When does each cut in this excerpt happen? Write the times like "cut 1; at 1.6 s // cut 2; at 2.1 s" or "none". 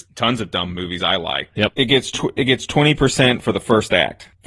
cut 1; at 1.5 s